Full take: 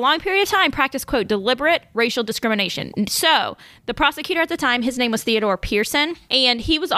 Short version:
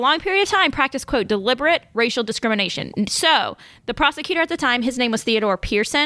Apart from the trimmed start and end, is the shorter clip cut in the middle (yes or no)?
no